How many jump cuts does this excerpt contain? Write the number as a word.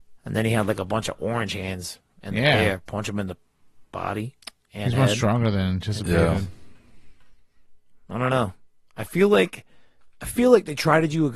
one